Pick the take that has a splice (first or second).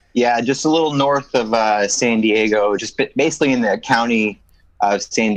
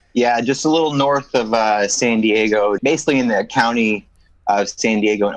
second